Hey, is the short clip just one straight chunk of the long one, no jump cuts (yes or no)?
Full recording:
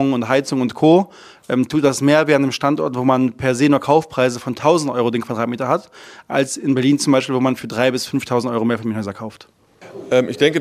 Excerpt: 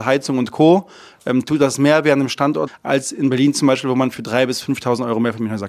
no